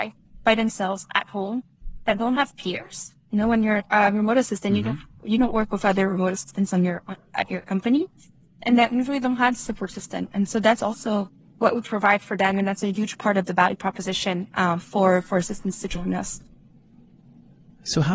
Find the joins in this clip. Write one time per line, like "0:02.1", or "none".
none